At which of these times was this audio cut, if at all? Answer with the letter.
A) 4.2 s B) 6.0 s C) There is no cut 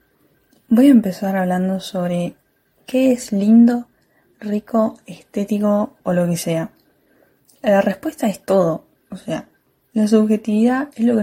B